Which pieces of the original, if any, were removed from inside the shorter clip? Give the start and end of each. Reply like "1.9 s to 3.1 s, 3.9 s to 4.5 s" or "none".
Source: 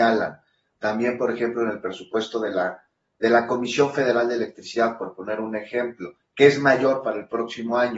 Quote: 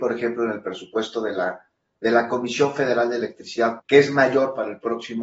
5.0 s to 6.3 s

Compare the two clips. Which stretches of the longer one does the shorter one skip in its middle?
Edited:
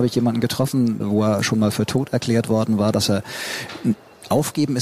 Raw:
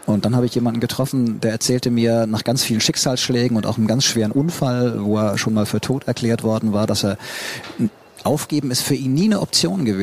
1.4 s to 4.9 s

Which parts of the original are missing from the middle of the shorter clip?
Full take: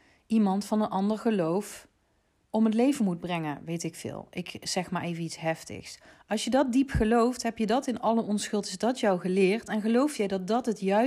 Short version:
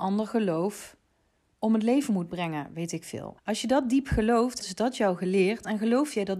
4.3 s to 6.2 s, 7.4 s to 8.6 s

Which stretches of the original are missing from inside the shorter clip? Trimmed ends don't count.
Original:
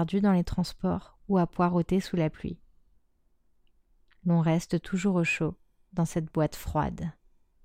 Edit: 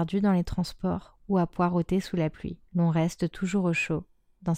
2.7 s to 4.2 s

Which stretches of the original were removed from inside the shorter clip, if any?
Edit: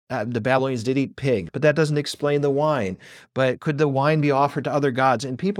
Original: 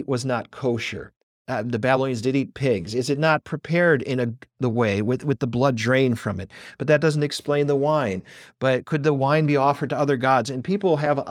2.9 s to 6.7 s

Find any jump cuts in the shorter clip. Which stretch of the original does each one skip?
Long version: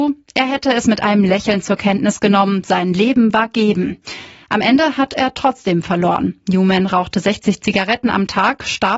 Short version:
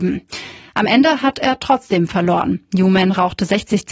none

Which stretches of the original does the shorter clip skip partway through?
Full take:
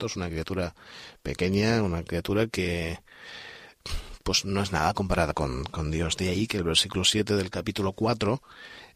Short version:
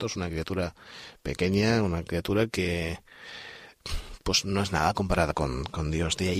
none

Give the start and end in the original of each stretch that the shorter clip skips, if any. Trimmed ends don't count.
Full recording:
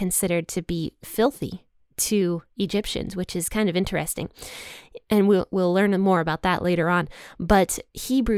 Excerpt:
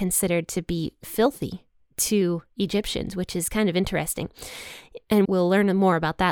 5.2 s to 5.5 s

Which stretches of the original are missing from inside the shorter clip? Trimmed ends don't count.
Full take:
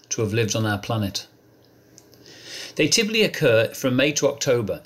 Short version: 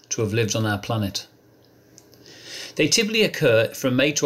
none

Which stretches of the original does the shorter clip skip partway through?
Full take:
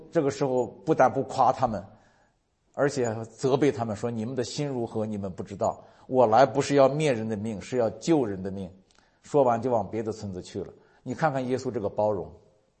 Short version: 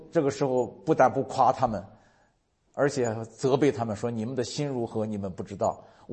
none

